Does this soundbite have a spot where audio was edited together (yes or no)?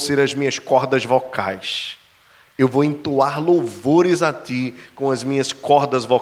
no